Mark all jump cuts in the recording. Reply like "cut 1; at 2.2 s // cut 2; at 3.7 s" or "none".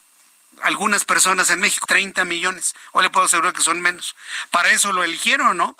cut 1; at 1.9 s